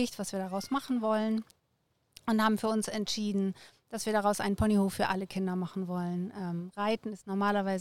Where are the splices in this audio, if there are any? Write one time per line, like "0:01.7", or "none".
none